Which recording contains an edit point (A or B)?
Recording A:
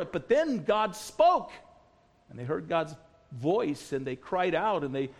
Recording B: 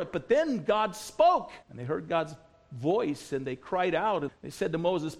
B